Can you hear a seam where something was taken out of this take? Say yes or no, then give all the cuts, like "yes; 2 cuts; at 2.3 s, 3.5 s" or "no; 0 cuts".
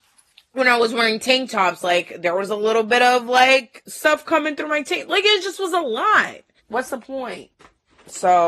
yes; 1 cut; at 6.6 s